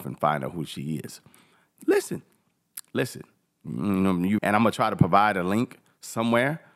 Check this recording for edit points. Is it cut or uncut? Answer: cut